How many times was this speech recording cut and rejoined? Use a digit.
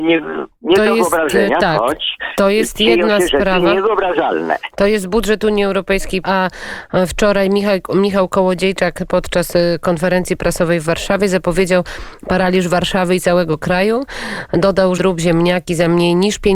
2